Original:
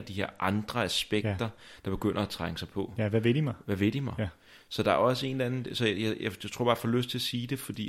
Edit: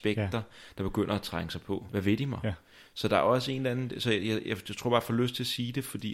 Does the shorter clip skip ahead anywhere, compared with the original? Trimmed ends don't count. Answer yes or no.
yes